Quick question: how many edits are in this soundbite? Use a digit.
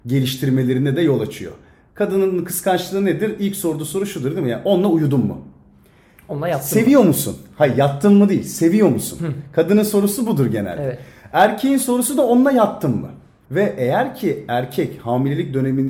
1